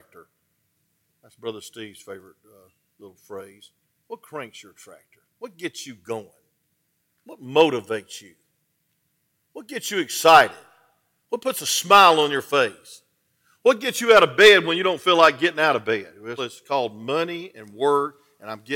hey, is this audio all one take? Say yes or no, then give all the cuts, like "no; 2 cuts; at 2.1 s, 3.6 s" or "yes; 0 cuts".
no; 1 cut; at 16.4 s